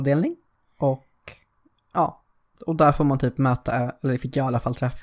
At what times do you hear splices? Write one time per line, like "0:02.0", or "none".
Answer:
none